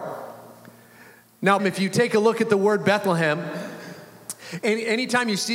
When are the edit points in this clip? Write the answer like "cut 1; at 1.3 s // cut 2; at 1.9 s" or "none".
cut 1; at 1.6 s